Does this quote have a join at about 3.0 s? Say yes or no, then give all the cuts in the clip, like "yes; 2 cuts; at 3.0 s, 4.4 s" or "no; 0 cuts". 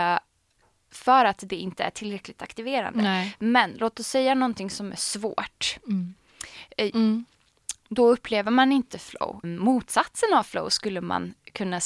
no; 2 cuts; at 6.9 s, 9.4 s